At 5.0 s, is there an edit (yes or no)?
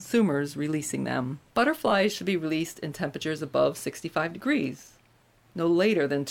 no